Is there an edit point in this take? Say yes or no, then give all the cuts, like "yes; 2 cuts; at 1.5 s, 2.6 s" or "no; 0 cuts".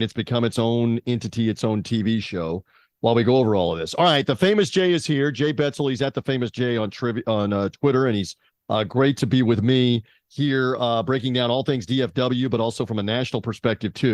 no; 0 cuts